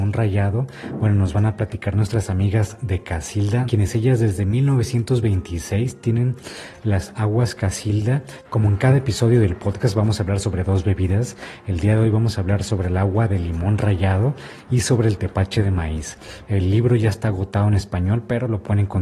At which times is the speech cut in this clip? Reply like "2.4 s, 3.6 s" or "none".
3.7 s, 8.4 s, 16.4 s